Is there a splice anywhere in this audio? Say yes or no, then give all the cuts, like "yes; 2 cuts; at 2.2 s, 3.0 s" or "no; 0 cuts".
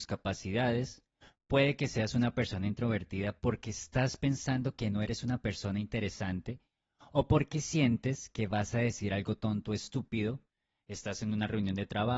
no; 0 cuts